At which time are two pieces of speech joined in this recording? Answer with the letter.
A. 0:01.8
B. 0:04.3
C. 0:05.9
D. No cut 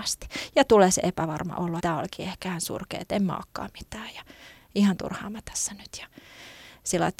A